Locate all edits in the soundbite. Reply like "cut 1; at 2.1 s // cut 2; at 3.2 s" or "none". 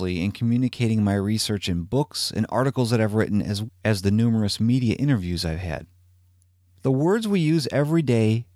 cut 1; at 3.7 s